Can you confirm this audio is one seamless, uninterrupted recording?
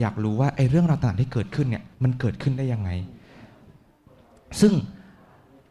no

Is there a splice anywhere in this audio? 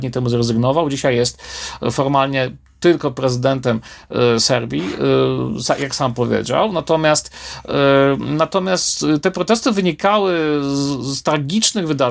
no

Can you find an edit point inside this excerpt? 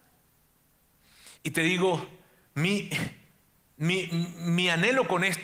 no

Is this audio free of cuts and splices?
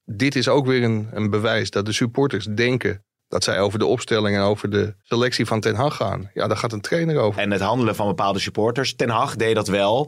no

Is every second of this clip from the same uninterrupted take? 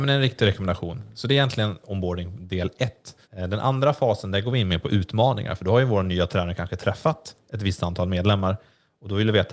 no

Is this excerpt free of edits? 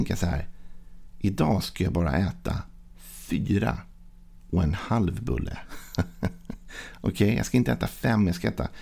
yes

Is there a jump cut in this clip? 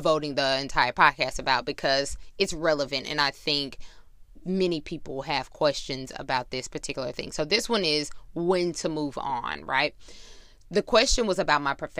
no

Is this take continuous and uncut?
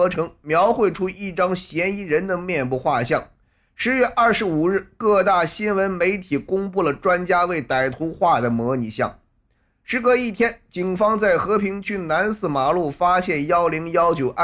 yes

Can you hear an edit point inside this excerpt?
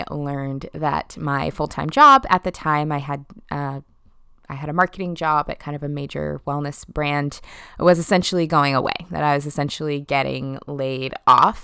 no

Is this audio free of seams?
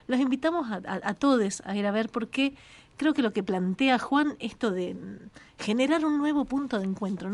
yes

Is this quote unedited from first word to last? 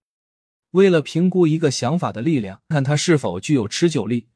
no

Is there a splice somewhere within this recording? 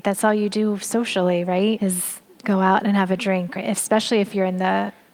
yes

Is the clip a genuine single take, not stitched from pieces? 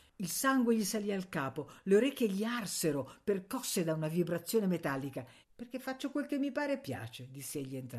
no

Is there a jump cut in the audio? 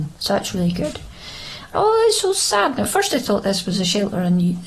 yes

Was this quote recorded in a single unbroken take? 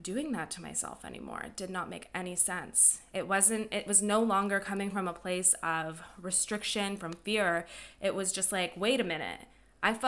no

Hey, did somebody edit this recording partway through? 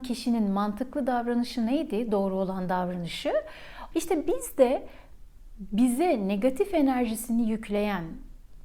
yes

